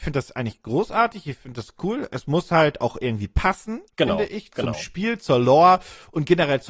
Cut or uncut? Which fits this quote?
uncut